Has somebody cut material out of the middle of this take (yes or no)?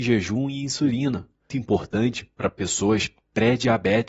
yes